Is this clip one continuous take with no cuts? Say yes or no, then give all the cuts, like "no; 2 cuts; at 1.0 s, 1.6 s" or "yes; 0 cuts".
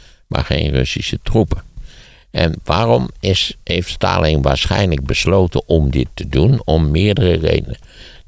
yes; 0 cuts